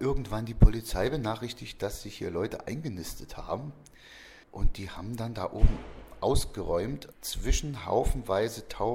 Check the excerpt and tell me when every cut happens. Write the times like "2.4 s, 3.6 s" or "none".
4.4 s, 7.1 s